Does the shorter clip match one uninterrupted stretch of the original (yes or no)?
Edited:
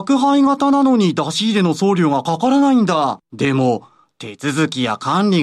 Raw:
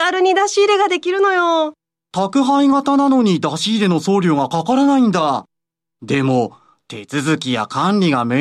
no